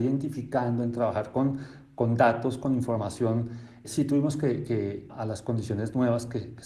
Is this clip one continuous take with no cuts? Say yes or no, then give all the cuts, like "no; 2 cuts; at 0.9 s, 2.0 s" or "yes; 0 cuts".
no; 2 cuts; at 3.8 s, 5.1 s